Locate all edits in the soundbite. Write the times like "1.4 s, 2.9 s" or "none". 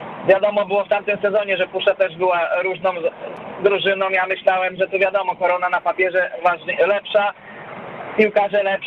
none

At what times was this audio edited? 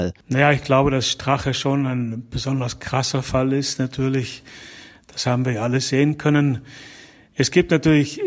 none

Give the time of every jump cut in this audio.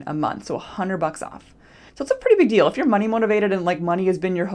1.9 s

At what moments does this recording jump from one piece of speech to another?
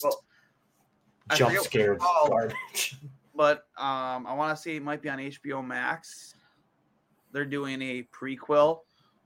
none

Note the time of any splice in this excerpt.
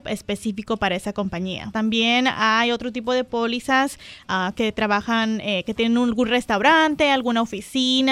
1.7 s, 4.5 s

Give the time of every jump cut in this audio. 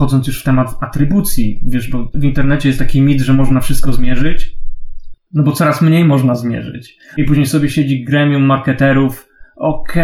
7.2 s

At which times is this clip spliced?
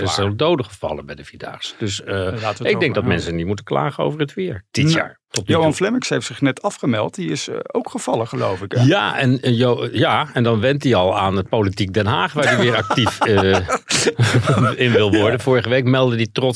none

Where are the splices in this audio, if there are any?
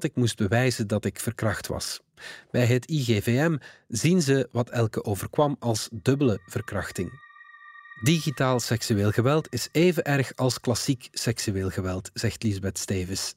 none

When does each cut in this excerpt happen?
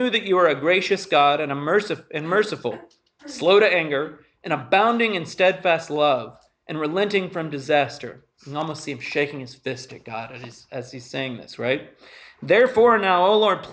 none

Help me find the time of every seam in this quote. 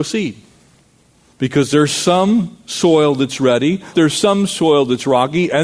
1.3 s, 3.9 s

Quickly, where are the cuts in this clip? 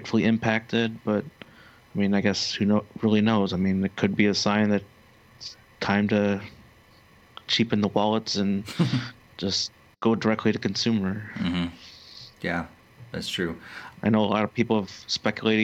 7.5 s, 13.9 s

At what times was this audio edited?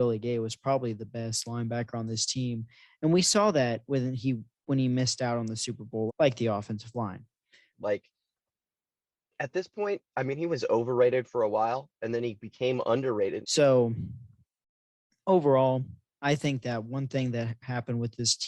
6.1 s, 7.7 s, 13.4 s

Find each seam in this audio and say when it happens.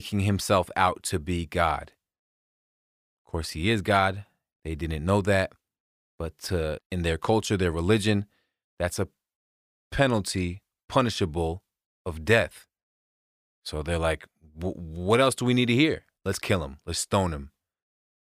6.8 s, 16.2 s

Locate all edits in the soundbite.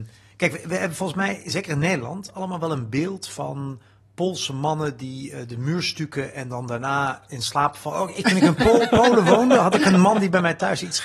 none

